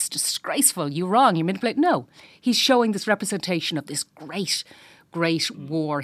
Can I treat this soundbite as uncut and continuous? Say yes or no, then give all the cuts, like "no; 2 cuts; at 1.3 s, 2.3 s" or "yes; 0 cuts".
yes; 0 cuts